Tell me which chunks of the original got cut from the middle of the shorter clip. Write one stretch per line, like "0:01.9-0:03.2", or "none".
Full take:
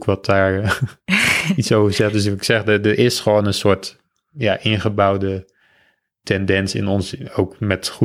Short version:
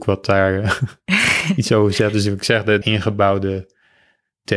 0:02.8-0:04.6